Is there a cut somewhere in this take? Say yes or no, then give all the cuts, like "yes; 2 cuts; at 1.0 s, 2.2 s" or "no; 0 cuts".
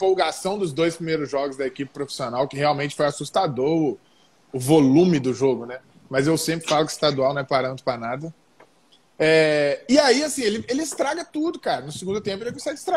no; 0 cuts